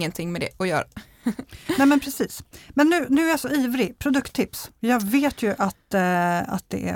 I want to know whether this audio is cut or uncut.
uncut